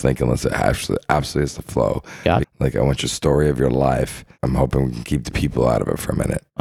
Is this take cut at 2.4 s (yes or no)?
yes